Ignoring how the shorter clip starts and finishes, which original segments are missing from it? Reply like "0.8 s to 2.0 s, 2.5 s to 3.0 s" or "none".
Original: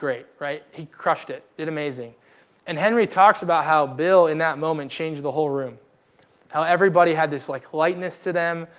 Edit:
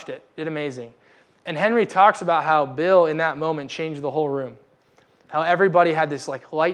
none